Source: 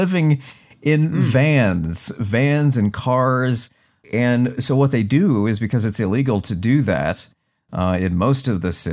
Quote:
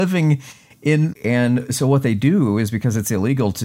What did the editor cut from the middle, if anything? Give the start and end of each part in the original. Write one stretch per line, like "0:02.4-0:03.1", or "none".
0:01.1-0:04.0